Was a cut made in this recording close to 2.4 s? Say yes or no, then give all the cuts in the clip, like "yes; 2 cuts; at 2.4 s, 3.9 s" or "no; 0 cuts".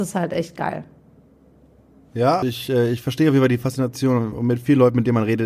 yes; 1 cut; at 2.4 s